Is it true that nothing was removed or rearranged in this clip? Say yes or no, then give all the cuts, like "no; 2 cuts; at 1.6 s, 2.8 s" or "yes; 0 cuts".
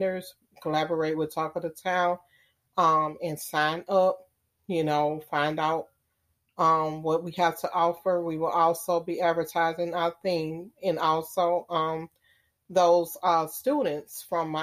yes; 0 cuts